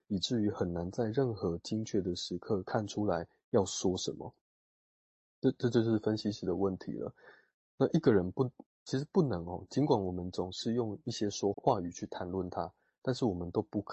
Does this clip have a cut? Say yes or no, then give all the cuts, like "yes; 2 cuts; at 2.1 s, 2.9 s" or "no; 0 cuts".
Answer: yes; 1 cut; at 11.5 s